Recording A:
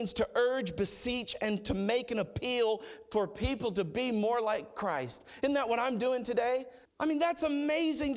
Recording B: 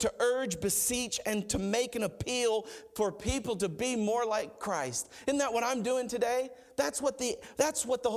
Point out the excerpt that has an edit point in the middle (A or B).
A